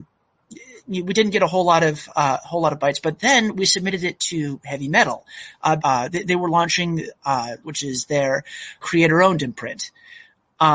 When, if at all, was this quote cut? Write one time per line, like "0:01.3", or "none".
0:05.8
0:07.6
0:08.8